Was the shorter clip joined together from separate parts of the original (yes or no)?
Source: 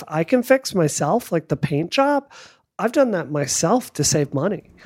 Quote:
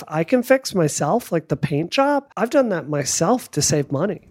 yes